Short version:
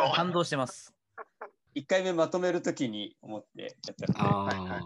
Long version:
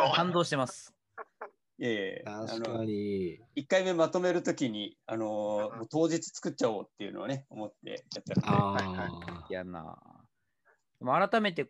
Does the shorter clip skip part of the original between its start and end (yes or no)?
yes